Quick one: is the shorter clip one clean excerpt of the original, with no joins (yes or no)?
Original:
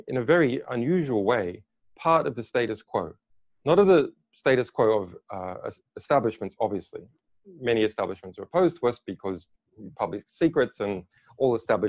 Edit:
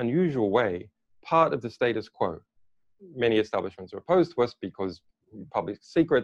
no